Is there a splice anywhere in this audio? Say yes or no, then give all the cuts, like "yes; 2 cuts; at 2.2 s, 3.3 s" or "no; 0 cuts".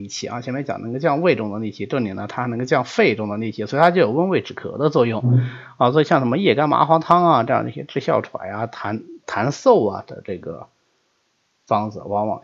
no; 0 cuts